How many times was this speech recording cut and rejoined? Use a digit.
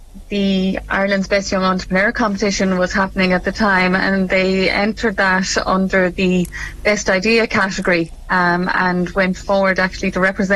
0